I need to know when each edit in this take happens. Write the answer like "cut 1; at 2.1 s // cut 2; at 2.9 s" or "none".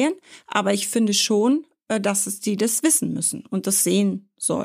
none